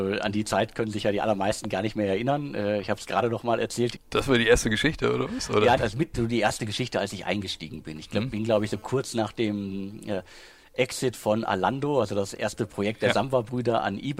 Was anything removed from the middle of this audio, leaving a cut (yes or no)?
yes